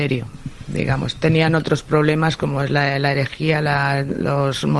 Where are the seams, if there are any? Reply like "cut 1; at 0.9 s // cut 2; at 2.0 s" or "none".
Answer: none